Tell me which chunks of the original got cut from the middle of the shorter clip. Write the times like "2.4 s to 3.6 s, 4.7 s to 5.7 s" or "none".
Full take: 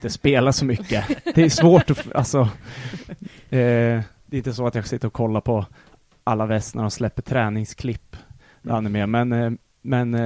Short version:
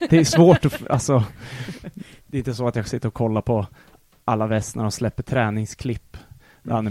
3.4 s to 4.2 s